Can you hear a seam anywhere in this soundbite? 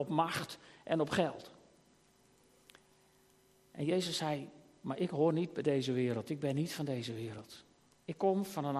no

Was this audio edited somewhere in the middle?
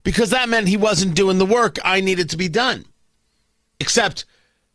yes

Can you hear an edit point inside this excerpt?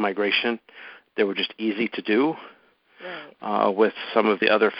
no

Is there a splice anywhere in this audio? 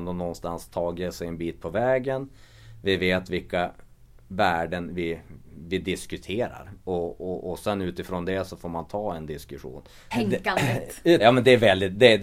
yes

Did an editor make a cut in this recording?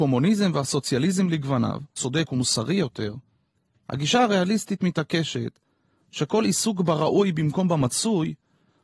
yes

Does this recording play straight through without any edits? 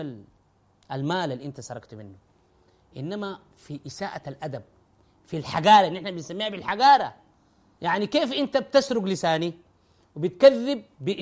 yes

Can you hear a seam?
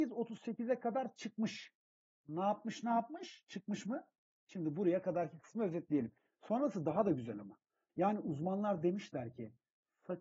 yes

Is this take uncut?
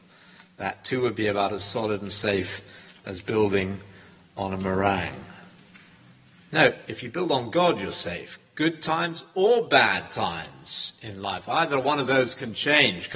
yes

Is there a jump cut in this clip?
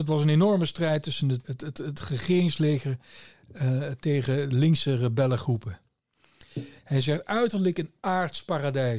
yes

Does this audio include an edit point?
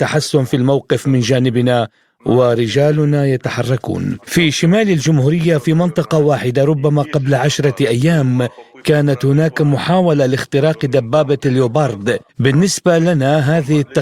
yes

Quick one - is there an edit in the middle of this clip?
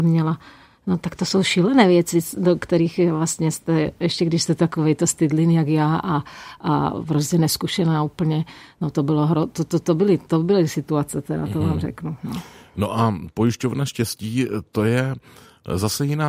no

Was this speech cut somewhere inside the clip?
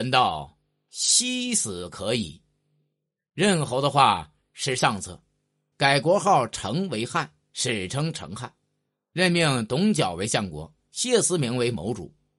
yes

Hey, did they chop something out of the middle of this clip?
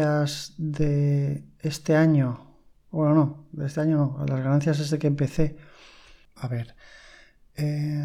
yes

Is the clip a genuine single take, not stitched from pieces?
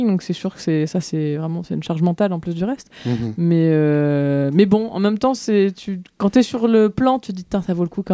yes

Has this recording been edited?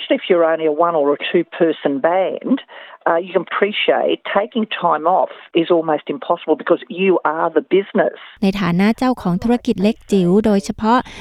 yes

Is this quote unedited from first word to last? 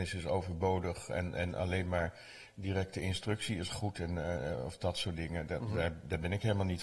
yes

